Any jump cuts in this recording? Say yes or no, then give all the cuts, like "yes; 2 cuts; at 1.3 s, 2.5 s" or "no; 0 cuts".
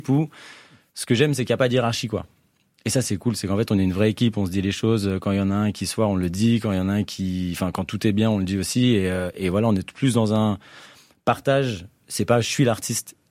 no; 0 cuts